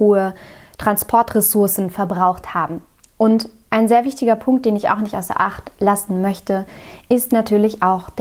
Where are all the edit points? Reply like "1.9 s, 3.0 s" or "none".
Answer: none